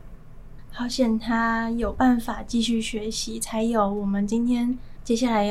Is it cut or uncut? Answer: uncut